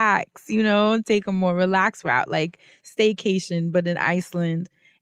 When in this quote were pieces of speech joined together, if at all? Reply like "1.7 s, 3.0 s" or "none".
none